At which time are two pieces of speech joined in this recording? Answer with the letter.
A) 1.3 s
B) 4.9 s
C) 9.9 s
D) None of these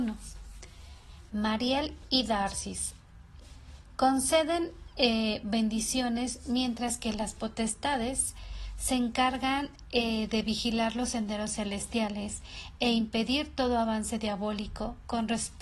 A